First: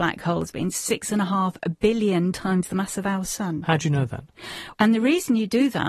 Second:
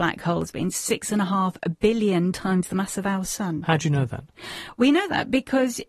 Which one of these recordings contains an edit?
first; 1 cut; at 4.7 s

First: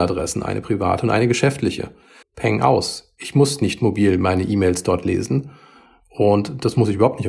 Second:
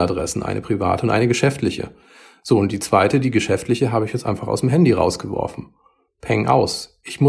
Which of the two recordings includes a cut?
first; 1 cut; at 2.2 s

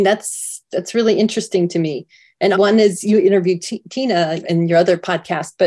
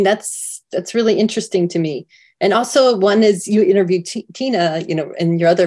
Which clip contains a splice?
first; 2 cuts; at 2.5 s, 4.4 s

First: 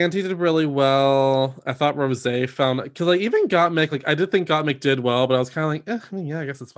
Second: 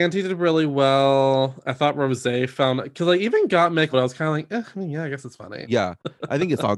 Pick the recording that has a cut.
second; 2 cuts; at 3.9 s, 5.6 s

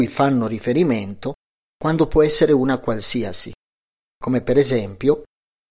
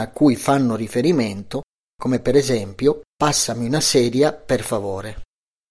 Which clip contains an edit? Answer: second; 2 cuts; at 1.9 s, 3.1 s

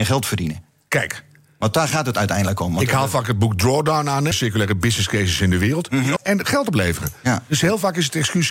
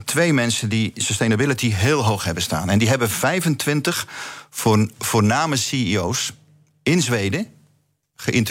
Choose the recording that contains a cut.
first; 2 cuts; at 4.3 s, 6.2 s

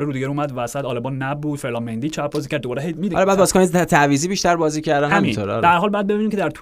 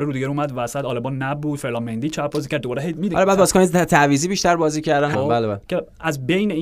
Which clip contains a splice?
second; 1 cut; at 5.1 s

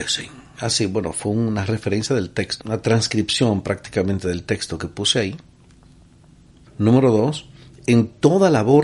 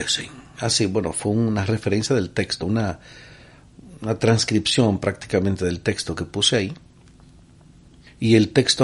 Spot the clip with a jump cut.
first; 2 cuts; at 2.6 s, 6.7 s

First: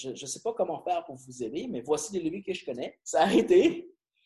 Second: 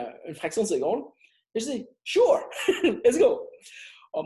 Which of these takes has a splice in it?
first; 1 cut; at 3.0 s

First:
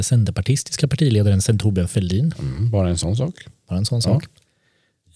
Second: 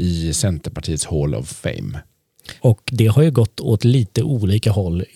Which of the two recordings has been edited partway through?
second; 1 cut; at 2.6 s

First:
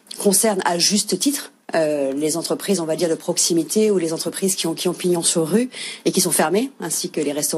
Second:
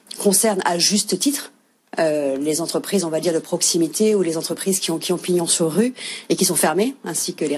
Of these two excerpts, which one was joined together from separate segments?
first; 1 cut; at 1.6 s

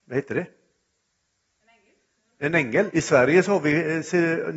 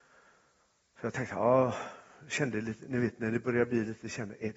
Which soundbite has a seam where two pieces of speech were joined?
first; 1 cut; at 2.9 s

